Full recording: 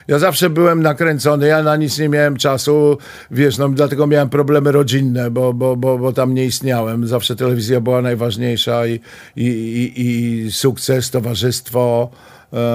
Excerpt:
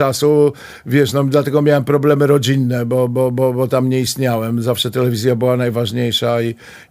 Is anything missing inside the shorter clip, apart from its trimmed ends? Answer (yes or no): no